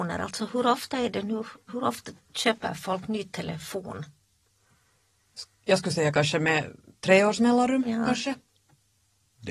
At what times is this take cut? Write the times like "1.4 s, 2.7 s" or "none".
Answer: 1.7 s